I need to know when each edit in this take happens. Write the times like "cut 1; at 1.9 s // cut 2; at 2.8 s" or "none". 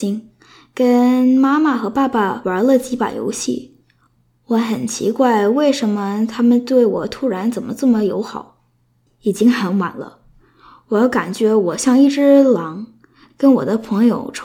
cut 1; at 9.1 s

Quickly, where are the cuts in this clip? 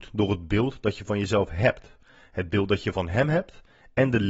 none

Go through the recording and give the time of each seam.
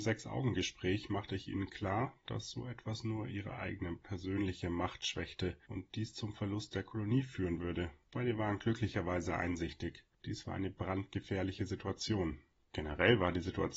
none

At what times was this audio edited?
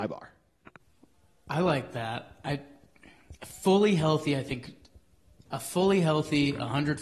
none

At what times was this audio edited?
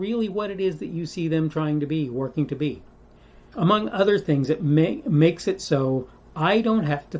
cut 1; at 3.5 s

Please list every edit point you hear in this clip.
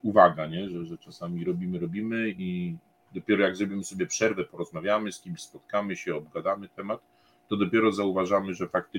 cut 1; at 1.4 s

